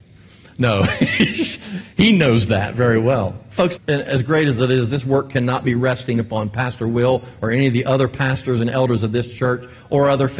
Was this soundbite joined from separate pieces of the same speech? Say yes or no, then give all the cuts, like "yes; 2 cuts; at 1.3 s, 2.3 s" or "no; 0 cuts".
yes; 1 cut; at 3.8 s